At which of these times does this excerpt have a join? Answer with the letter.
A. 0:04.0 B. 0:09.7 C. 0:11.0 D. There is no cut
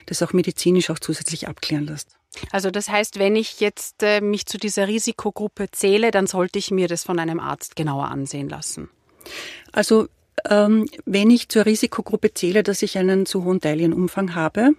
D